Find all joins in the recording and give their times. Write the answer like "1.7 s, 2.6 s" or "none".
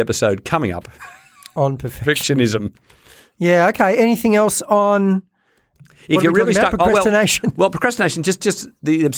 none